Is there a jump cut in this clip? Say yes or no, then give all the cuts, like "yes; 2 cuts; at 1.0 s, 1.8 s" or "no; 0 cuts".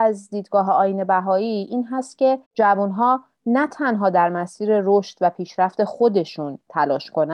yes; 1 cut; at 2.4 s